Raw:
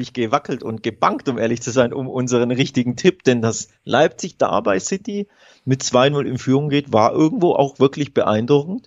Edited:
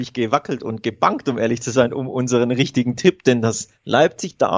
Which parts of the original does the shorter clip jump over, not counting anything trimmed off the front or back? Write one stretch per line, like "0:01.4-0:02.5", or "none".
none